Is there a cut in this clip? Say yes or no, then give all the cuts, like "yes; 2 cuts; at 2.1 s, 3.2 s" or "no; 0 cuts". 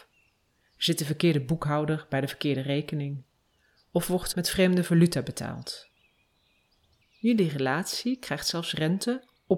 yes; 2 cuts; at 4.3 s, 7.0 s